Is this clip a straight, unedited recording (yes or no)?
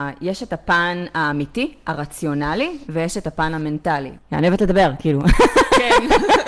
no